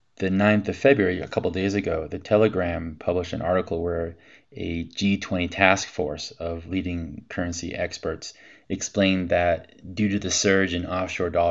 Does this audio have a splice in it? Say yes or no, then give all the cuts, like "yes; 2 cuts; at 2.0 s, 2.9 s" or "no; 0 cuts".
no; 0 cuts